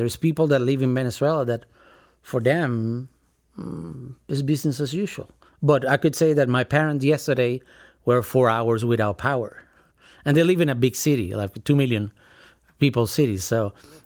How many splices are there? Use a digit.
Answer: 0